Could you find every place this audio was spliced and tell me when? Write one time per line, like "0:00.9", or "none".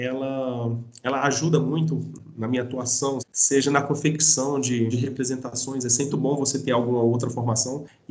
0:03.2
0:04.9
0:06.1